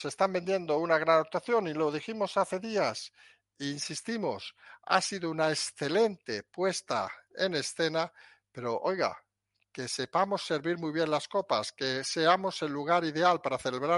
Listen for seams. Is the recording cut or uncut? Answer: uncut